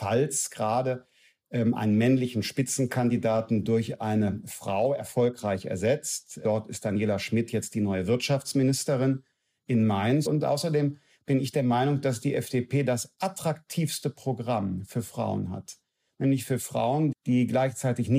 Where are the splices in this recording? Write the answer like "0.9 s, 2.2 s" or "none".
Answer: 10.3 s, 17.1 s